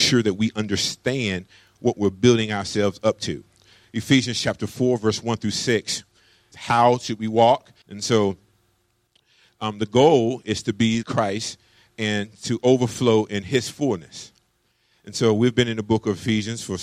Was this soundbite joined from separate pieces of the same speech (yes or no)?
yes